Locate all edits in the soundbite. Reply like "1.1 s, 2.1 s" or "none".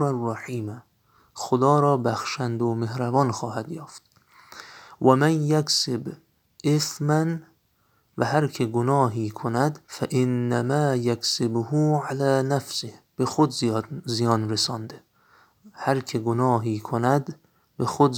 9.8 s